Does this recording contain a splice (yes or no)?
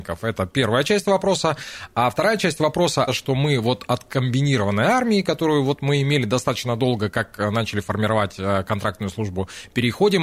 yes